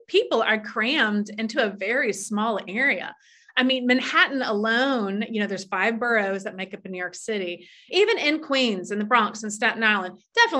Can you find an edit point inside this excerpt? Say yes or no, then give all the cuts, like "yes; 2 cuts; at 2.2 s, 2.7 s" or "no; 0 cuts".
yes; 1 cut; at 7.9 s